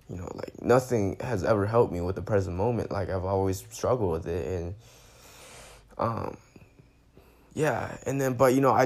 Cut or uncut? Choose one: uncut